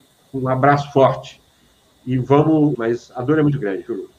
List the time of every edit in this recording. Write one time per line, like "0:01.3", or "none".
0:02.7